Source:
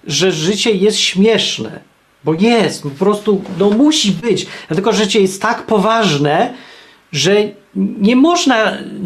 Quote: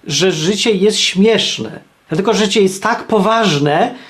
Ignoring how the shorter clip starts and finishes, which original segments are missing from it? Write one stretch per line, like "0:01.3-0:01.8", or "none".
0:02.1-0:04.7